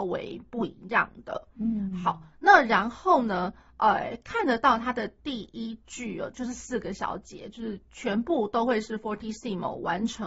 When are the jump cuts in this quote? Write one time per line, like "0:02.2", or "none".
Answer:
none

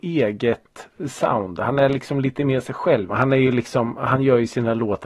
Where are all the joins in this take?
0:03.1

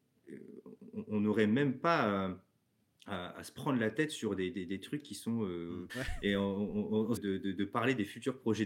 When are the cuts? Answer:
0:05.9
0:07.2

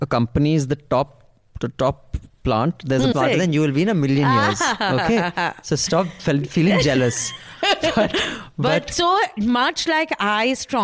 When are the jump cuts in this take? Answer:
0:03.1

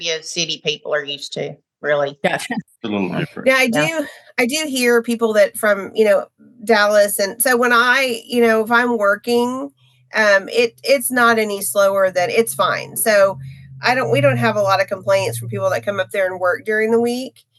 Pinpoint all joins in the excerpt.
none

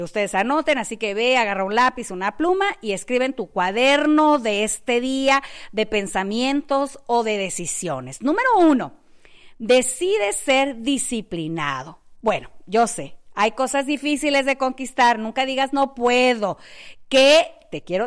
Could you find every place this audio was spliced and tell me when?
0:12.2

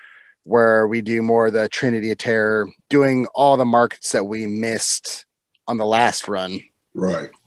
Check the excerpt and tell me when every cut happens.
0:02.8

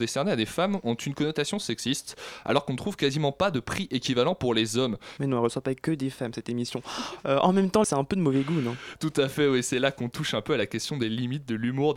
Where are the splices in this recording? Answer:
0:05.2
0:07.8

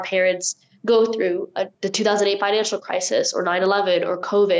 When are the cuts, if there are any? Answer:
0:01.7

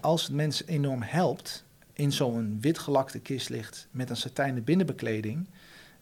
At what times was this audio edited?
0:01.9

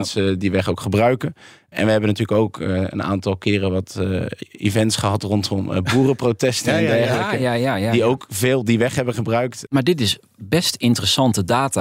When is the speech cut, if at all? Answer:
0:09.7

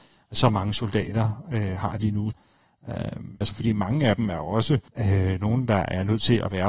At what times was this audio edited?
0:02.3
0:03.4
0:04.9

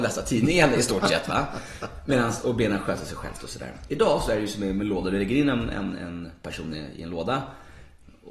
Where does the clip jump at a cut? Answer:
0:03.9

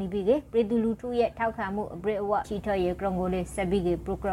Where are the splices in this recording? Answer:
0:02.4

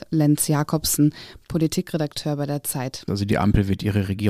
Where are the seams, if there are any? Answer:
0:03.1

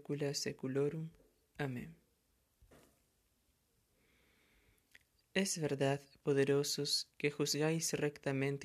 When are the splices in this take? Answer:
0:07.1

